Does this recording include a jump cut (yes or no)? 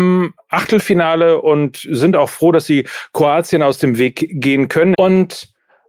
yes